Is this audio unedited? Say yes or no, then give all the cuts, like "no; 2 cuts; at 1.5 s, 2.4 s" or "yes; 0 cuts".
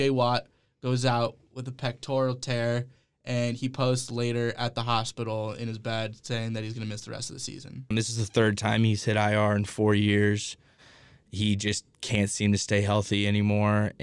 no; 1 cut; at 7.9 s